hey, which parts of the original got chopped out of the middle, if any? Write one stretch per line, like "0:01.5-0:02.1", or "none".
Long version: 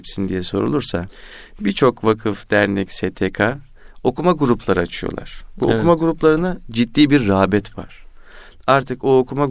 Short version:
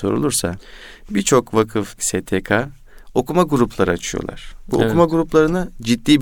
0:02.5-0:02.9